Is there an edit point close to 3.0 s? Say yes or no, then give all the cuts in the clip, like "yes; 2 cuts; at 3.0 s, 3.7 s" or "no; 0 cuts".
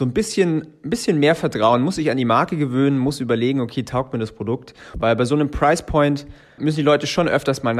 no; 2 cuts; at 4.9 s, 6.6 s